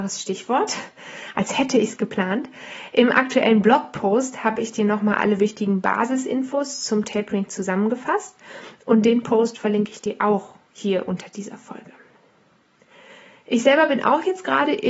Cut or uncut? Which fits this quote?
uncut